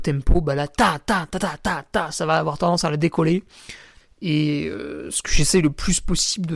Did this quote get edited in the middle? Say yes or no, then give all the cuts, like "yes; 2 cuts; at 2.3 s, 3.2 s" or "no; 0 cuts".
yes; 1 cut; at 4.0 s